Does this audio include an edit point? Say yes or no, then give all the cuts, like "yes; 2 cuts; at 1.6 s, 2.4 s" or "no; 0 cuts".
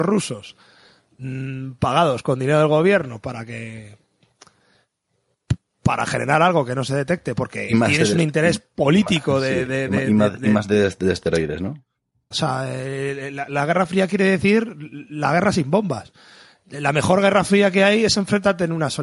yes; 1 cut; at 12.3 s